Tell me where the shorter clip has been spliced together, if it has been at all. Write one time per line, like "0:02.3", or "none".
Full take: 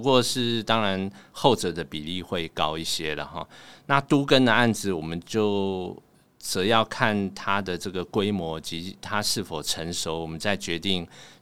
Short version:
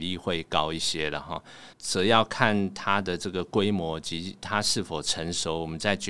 0:01.7